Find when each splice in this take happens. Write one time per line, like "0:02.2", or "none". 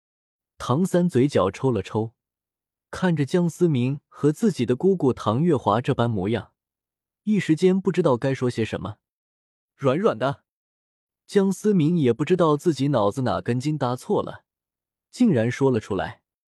none